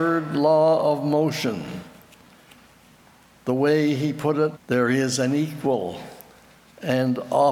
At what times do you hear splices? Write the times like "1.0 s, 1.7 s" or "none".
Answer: 4.5 s